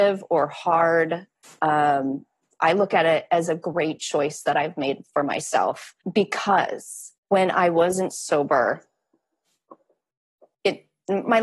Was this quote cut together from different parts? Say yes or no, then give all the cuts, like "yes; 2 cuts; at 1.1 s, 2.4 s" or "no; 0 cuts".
yes; 2 cuts; at 6.0 s, 7.2 s